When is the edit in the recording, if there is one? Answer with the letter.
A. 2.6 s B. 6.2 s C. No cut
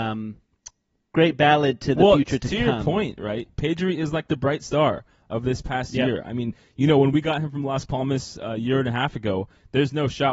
C